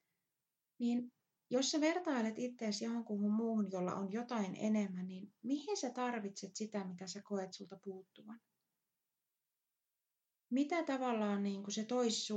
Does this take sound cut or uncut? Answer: uncut